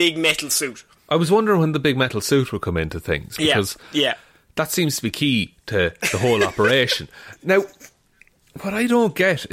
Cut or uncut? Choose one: uncut